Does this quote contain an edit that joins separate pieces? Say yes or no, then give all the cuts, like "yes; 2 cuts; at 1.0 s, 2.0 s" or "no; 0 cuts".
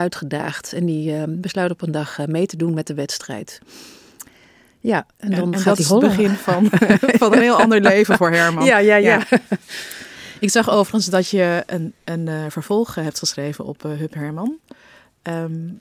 no; 0 cuts